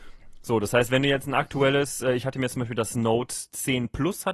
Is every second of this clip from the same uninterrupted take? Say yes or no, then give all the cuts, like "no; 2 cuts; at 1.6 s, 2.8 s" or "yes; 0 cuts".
yes; 0 cuts